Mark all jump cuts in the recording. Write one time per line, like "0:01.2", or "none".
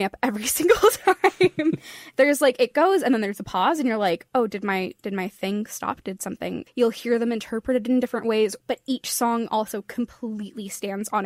0:06.7
0:08.6

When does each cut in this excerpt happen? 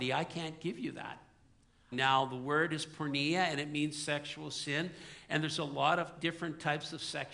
0:01.9

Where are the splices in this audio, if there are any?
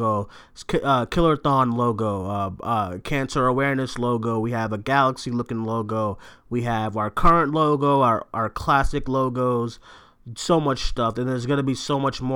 none

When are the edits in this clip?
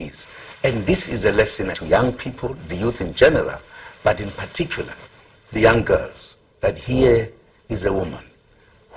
0:01.7

